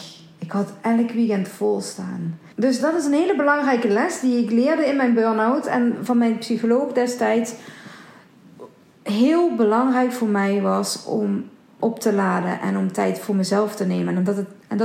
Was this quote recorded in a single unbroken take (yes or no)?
no